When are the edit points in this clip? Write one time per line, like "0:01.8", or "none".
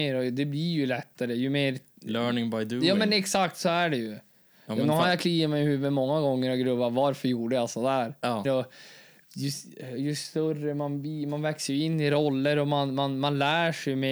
0:08.4